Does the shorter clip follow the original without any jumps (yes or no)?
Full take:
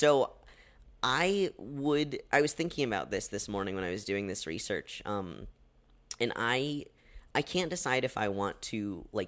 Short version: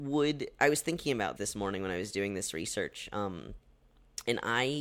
no